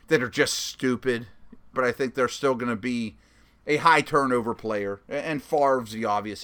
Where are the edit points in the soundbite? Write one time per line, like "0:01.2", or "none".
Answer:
0:01.7